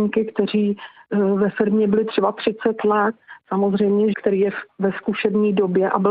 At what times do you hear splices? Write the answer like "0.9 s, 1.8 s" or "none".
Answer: 4.1 s